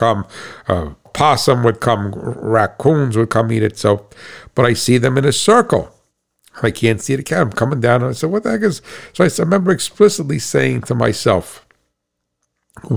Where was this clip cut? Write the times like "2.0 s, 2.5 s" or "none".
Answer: 1.1 s